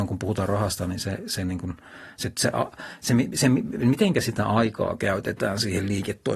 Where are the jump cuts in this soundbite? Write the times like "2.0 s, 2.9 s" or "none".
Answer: none